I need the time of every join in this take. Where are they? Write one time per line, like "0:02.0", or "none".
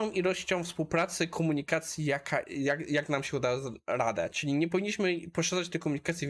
0:02.4